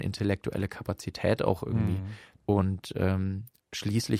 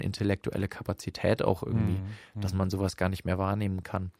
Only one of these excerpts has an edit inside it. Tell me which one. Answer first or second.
first